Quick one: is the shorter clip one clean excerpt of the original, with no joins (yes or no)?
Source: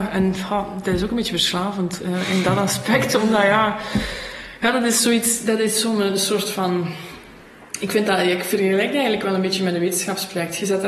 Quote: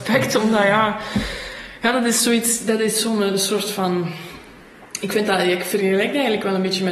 yes